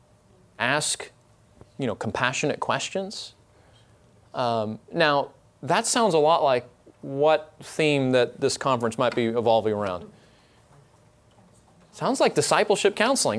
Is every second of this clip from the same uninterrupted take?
yes; 0 cuts

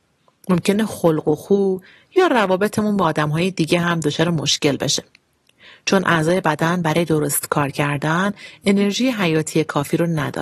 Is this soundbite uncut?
yes; 0 cuts

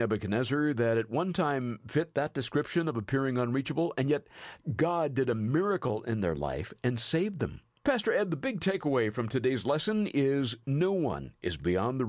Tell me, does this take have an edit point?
yes; 1 cut; at 7.8 s

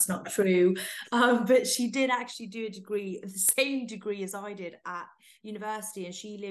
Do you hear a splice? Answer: no; 0 cuts

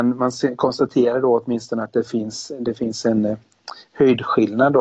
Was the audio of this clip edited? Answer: no; 0 cuts

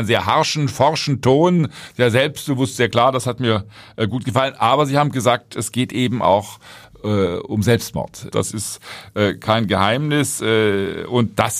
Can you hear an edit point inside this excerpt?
yes; 1 cut; at 8.3 s

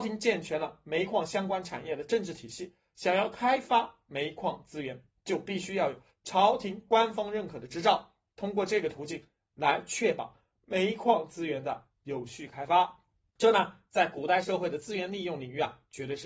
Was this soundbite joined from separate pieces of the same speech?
no; 0 cuts

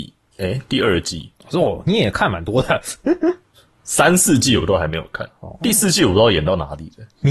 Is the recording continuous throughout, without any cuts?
yes; 0 cuts

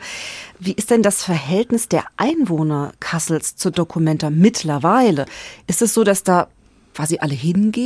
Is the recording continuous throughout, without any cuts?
yes; 0 cuts

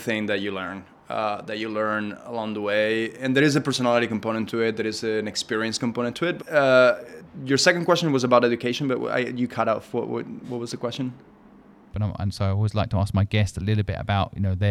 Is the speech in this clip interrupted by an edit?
yes; 2 cuts; at 6.4 s, 11.9 s

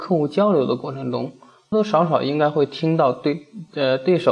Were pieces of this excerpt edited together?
yes; 1 cut; at 1.7 s

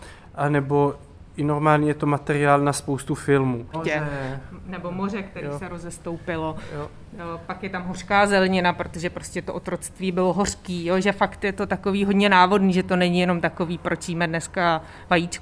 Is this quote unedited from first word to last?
no; 1 cut; at 3.7 s

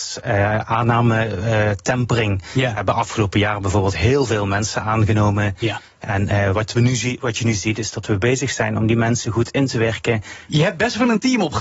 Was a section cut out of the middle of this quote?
yes; 1 cut; at 10.5 s

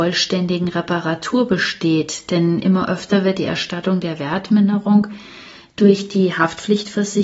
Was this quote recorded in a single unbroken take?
yes; 0 cuts

